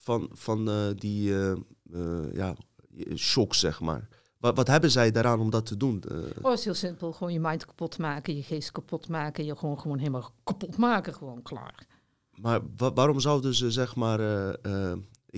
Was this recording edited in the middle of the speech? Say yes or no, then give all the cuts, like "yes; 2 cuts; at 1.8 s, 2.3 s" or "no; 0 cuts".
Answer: no; 0 cuts